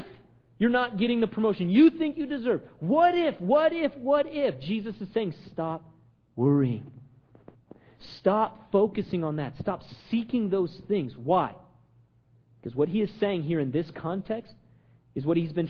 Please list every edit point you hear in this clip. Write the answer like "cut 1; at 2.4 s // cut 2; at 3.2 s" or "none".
none